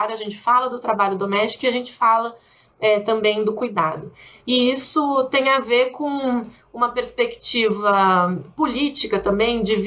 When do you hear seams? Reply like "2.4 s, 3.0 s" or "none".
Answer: none